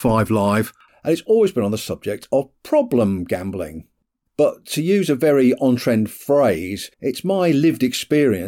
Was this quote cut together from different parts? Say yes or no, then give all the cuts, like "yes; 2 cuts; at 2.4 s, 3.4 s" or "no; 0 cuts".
yes; 2 cuts; at 4.1 s, 6.9 s